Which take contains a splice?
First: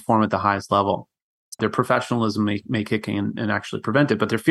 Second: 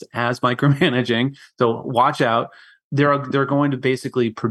first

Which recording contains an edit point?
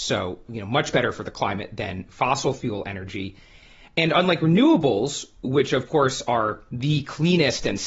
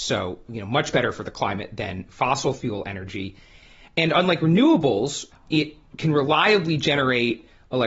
second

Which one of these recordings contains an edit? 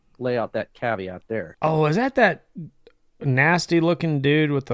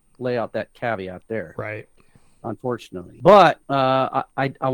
first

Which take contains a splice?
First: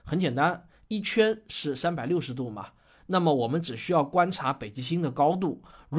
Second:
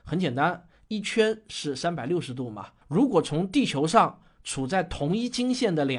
second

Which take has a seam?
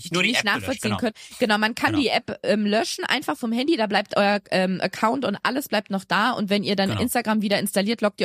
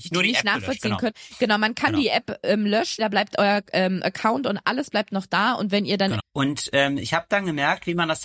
second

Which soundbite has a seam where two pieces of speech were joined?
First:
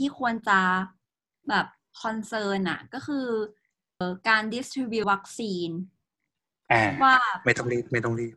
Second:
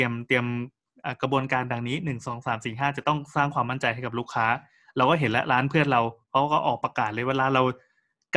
first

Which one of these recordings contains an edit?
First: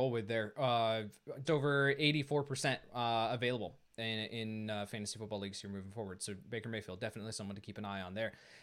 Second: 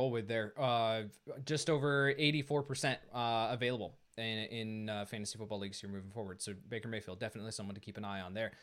first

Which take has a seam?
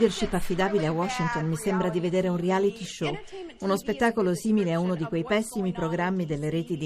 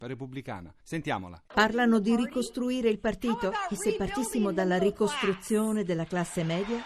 second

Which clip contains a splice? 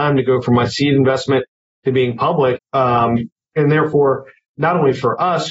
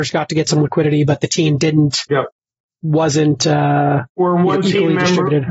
first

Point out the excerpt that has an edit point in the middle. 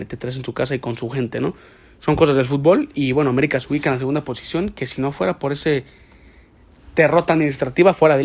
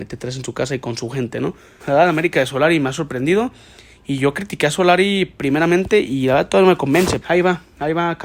second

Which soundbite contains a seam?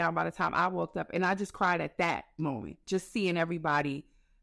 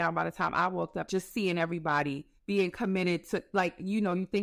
second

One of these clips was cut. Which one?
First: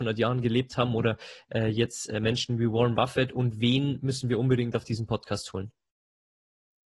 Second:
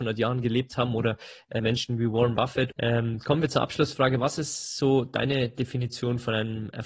second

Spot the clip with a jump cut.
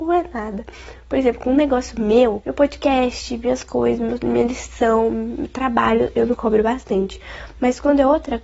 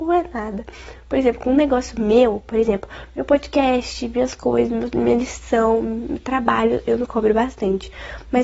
first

